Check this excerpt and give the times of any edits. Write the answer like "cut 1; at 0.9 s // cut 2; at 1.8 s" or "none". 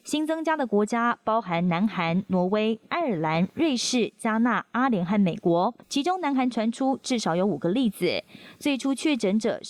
cut 1; at 5.8 s